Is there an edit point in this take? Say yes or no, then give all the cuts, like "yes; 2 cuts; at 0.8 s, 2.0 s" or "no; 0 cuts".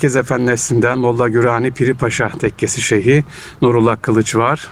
no; 0 cuts